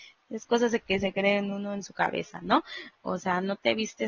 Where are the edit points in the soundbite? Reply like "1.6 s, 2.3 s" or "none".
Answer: 2.9 s